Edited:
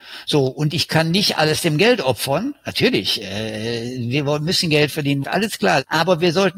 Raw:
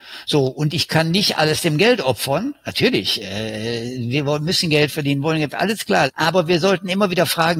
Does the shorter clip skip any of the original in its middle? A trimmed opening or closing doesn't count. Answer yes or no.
yes